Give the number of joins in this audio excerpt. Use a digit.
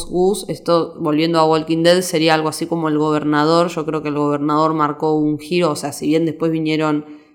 0